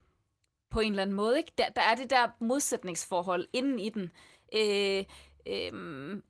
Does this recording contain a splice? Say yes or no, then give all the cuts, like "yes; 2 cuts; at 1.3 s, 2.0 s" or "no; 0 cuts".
no; 0 cuts